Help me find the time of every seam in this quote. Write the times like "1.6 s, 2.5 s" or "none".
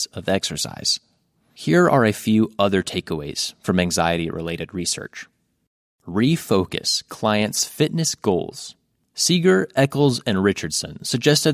none